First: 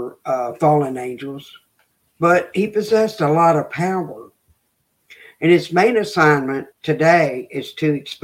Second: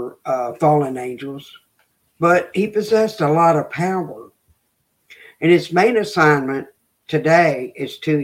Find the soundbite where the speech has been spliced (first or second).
first